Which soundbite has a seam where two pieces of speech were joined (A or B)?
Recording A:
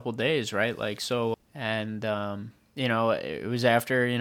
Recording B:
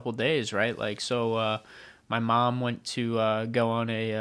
A